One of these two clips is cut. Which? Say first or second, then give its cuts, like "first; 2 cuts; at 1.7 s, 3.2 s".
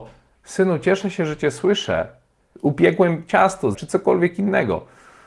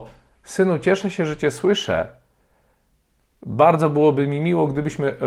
first; 2 cuts; at 2.5 s, 3.7 s